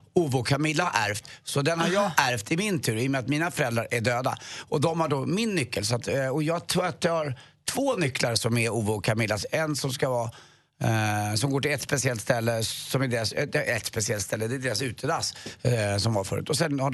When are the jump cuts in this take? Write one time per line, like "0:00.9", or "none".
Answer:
none